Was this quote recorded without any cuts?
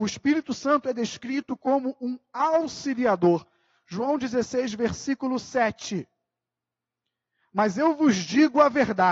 yes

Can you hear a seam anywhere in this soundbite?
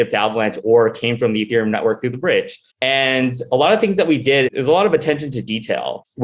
yes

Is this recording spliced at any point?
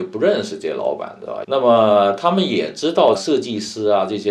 yes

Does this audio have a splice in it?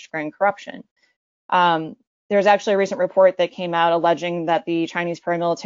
no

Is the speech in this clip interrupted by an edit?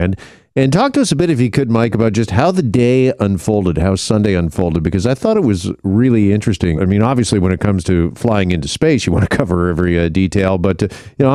yes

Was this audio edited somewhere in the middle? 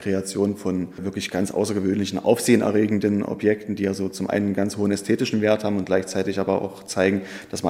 no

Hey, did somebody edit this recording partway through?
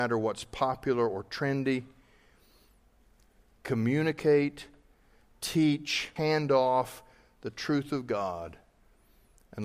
yes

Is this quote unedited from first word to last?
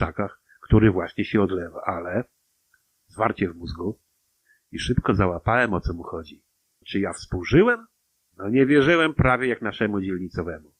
no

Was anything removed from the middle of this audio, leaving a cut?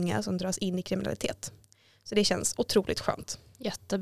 no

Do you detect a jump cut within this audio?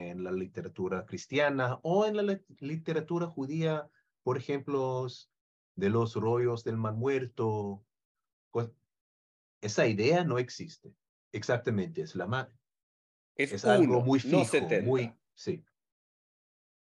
no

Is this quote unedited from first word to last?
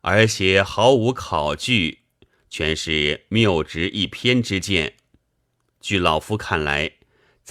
yes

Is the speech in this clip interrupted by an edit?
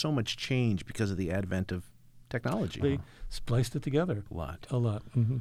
yes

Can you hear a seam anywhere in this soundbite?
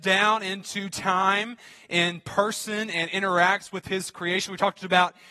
no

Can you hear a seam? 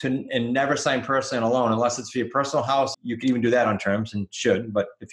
yes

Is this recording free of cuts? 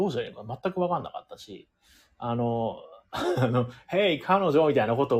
yes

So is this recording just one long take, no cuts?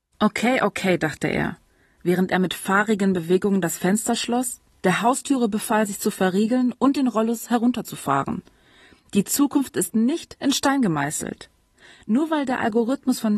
yes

